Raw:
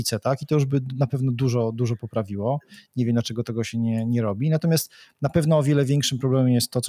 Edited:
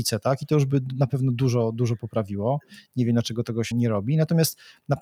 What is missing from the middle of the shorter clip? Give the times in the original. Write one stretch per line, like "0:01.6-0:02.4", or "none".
0:03.7-0:04.0